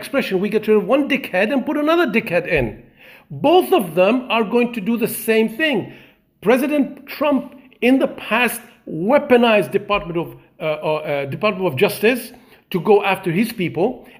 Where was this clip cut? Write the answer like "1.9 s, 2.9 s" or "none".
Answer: none